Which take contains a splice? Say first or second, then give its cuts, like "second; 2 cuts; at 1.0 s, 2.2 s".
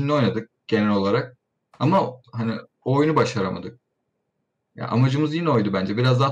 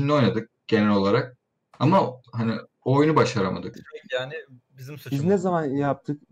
second; 1 cut; at 3.7 s